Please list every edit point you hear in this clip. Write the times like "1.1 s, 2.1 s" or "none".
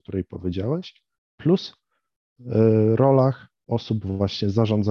none